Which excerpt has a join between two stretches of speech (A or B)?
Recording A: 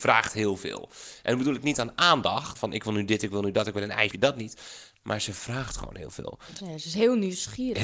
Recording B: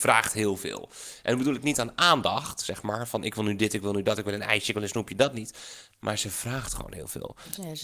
A